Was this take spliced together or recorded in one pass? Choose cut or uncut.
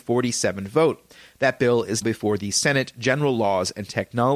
cut